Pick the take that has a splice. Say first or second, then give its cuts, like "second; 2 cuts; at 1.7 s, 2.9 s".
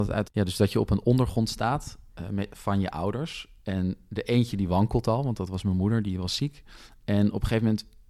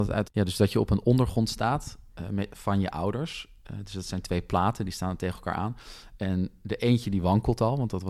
first; 1 cut; at 3.6 s